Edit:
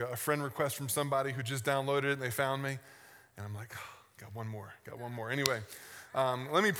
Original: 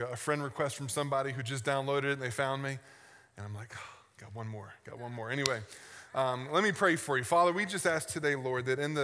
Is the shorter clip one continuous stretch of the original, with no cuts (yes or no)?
yes